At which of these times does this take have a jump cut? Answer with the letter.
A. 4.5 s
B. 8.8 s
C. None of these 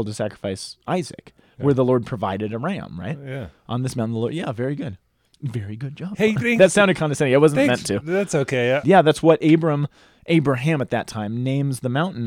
B